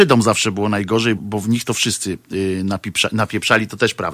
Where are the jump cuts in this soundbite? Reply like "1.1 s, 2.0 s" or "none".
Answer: 1.2 s